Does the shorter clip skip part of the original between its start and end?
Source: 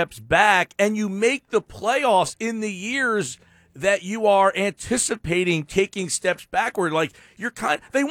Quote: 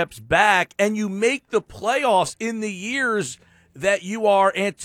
no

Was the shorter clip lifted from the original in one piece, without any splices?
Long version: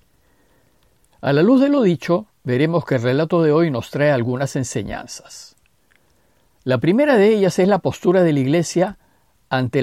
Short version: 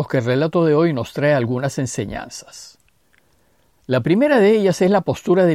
yes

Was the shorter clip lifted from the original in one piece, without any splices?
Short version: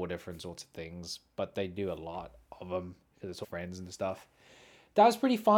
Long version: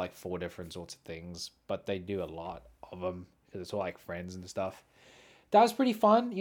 no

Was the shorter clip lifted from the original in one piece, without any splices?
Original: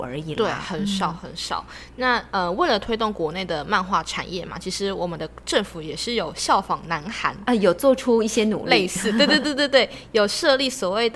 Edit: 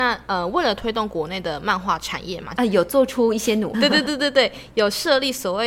no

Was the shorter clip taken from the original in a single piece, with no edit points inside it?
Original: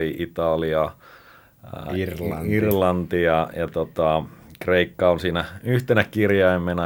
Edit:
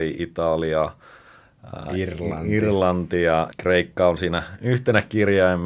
no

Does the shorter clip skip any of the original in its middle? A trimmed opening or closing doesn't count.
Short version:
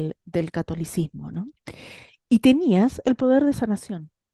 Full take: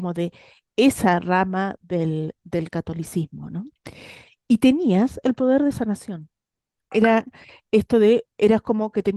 no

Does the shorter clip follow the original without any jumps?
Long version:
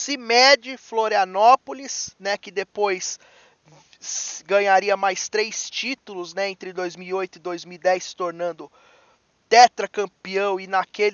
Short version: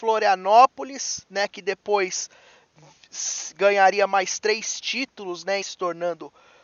no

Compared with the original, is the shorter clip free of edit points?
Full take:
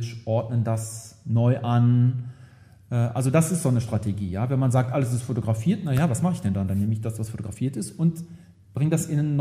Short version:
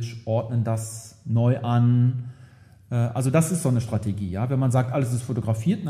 yes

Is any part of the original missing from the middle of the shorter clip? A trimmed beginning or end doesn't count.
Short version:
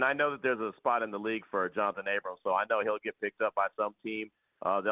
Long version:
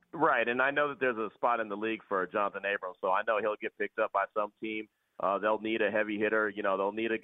no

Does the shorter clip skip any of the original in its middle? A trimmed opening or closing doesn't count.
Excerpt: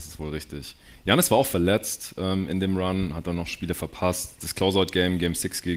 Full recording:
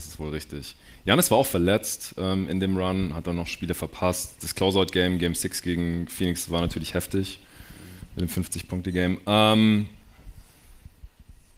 no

